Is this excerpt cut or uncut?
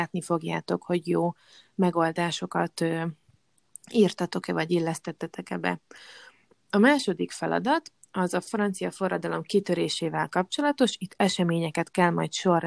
uncut